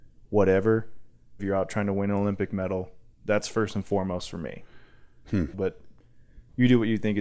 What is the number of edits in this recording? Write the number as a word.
two